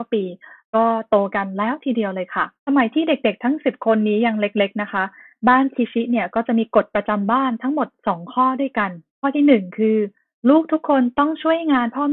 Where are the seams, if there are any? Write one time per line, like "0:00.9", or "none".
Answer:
0:02.6
0:09.1